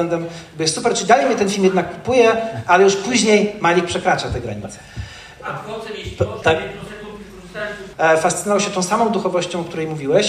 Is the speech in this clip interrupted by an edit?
yes; 2 cuts; at 6.4 s, 7.9 s

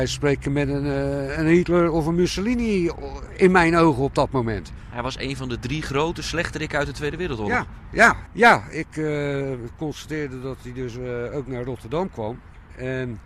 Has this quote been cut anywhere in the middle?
yes; 1 cut; at 8.3 s

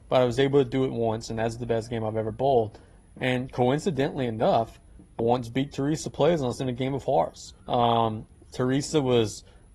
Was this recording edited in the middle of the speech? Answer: yes; 2 cuts; at 5.2 s, 7.6 s

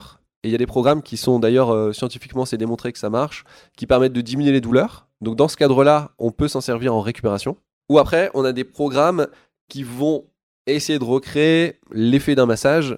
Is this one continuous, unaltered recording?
yes; 0 cuts

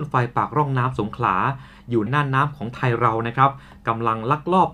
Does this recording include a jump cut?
yes; 1 cut; at 2.1 s

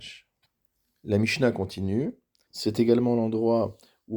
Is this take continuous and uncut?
no; 1 cut; at 2.5 s

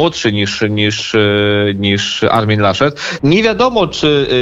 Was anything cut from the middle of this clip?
yes; 1 cut; at 3.2 s

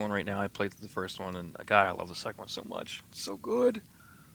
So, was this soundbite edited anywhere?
no; 0 cuts

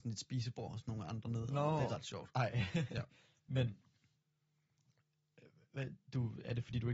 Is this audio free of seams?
yes; 0 cuts

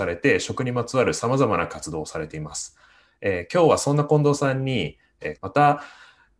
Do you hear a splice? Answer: yes; 1 cut; at 5.4 s

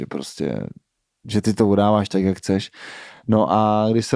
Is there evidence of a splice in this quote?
no; 0 cuts

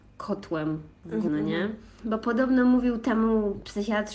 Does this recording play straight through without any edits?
no; 1 cut; at 1.3 s

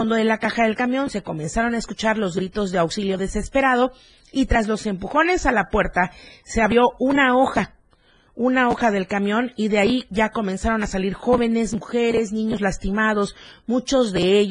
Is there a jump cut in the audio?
no; 0 cuts

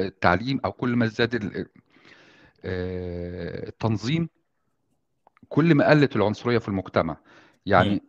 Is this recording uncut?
yes; 0 cuts

